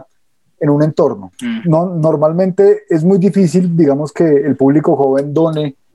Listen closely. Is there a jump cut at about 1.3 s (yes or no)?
yes